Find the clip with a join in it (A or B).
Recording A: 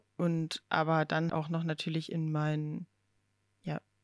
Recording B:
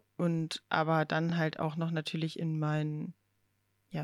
A